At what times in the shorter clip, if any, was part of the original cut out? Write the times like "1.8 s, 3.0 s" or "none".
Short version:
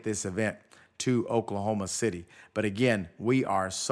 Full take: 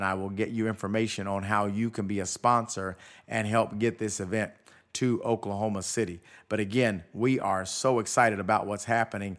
none